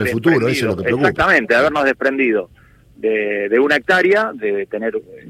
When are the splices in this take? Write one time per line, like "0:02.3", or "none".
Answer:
none

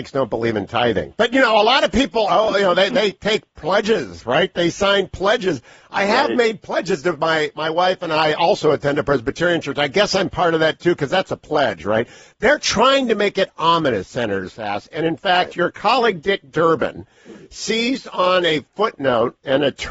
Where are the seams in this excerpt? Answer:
none

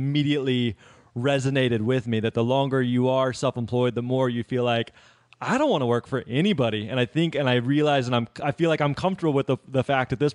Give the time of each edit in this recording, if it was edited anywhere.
none

